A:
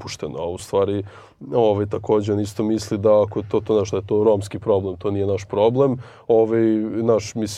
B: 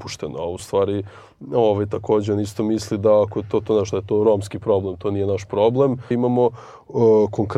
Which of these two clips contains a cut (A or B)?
B